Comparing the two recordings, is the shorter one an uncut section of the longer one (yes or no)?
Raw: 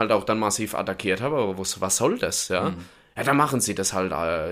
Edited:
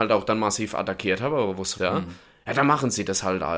no